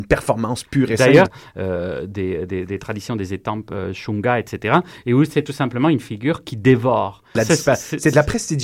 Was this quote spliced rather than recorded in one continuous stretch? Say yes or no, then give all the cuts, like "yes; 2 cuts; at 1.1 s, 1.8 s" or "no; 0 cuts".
yes; 2 cuts; at 1.3 s, 7.3 s